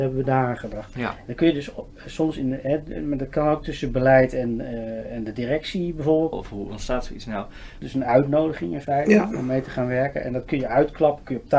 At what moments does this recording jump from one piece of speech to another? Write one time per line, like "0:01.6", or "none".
0:06.3
0:07.8